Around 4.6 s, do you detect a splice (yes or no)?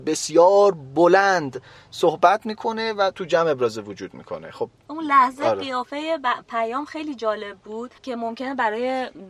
no